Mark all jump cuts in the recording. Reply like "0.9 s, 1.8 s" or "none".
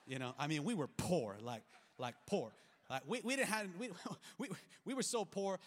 none